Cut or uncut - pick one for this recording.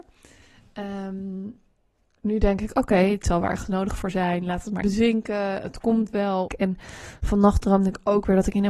cut